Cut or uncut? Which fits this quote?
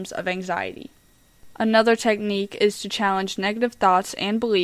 uncut